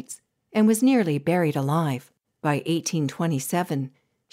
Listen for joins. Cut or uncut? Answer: cut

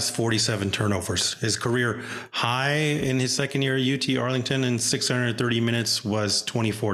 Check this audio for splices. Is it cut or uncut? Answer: uncut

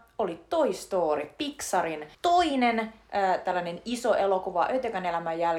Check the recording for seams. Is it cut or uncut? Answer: cut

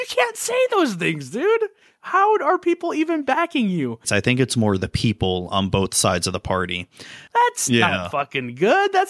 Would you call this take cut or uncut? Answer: cut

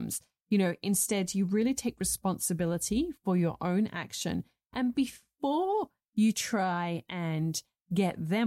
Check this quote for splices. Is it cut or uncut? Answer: uncut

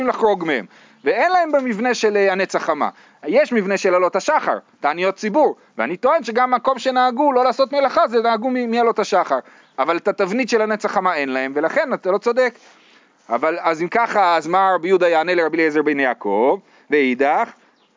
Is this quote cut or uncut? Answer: uncut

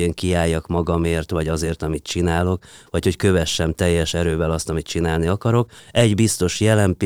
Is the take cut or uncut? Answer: cut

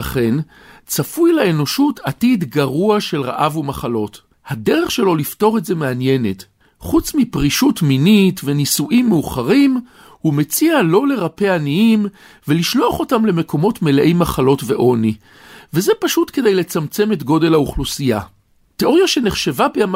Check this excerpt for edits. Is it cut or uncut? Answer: cut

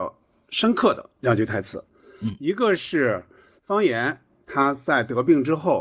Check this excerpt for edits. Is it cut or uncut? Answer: uncut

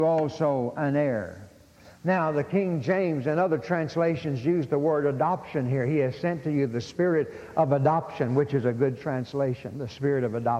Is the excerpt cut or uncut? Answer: uncut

